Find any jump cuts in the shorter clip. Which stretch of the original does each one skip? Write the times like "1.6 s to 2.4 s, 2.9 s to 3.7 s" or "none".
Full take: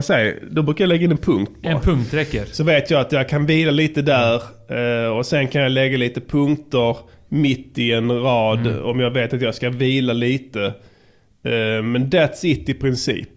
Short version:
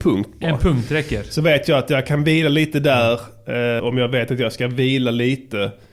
5.0 s to 8.8 s